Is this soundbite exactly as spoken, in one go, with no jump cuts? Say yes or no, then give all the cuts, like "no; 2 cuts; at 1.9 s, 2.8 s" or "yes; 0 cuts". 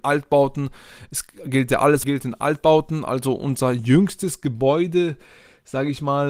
no; 1 cut; at 2.0 s